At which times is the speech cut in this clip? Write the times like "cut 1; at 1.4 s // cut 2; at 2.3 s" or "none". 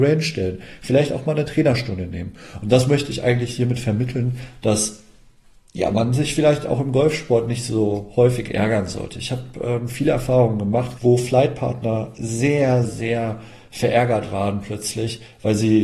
cut 1; at 11.0 s // cut 2; at 12.8 s